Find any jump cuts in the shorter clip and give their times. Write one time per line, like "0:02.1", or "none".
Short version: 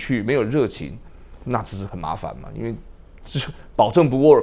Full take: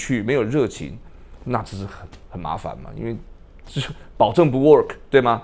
0:01.9